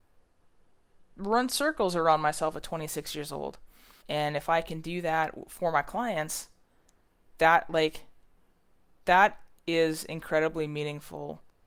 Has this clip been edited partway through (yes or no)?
yes